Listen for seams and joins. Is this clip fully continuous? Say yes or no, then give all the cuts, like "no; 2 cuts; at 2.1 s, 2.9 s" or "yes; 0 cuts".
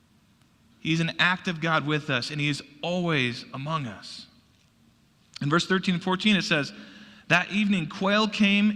yes; 0 cuts